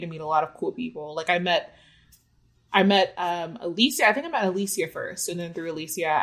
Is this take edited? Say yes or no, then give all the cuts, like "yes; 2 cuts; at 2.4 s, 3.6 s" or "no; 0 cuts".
no; 0 cuts